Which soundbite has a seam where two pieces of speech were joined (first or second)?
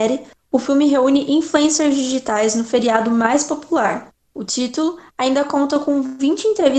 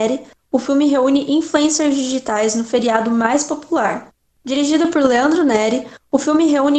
first